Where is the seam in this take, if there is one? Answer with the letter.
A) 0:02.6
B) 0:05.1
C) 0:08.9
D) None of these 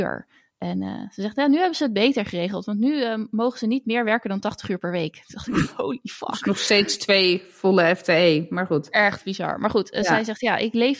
D